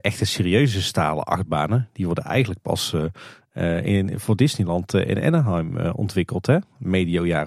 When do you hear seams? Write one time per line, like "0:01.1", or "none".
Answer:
none

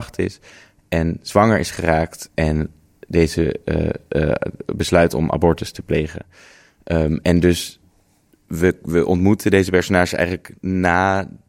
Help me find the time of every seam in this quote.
none

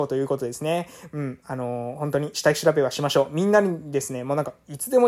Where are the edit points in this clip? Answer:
none

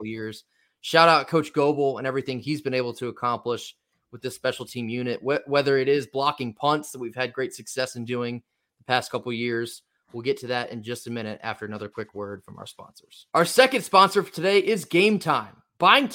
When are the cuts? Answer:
0:10.0
0:13.3

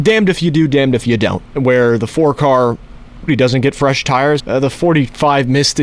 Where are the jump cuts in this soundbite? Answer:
0:03.3
0:04.4

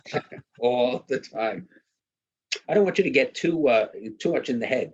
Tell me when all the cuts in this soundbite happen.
0:02.6

